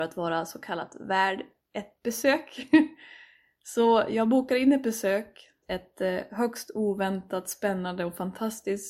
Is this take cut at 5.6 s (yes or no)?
yes